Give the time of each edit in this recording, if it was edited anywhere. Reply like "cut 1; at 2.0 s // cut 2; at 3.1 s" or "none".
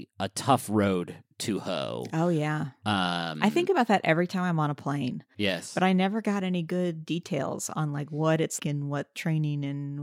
cut 1; at 5.3 s // cut 2; at 8.6 s